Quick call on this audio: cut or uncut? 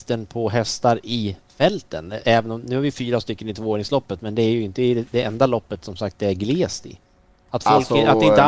uncut